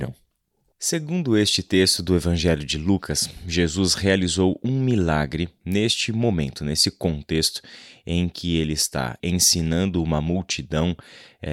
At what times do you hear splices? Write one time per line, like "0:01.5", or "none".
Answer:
0:09.2